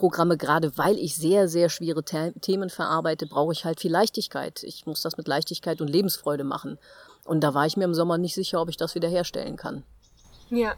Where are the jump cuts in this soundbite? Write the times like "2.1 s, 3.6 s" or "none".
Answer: none